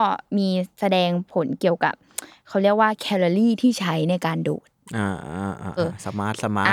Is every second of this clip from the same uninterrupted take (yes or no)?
no